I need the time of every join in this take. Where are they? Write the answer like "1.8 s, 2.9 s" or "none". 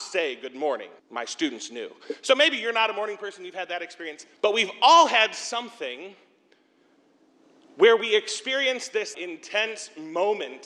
1.0 s, 4.4 s, 9.1 s